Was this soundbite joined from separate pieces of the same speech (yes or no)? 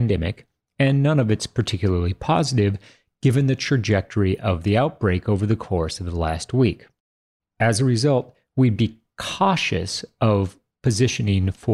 no